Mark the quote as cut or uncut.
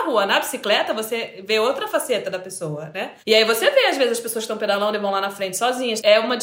cut